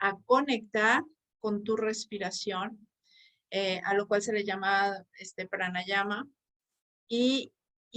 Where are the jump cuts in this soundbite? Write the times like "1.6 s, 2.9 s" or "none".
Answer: none